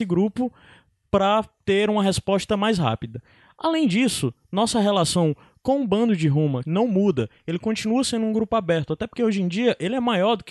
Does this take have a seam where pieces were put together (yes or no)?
yes